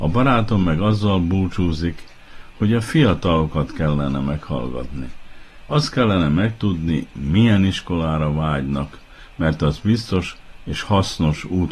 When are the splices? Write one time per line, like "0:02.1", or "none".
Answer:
0:05.6

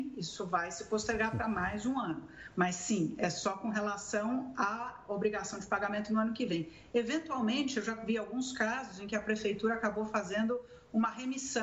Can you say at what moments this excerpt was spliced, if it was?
none

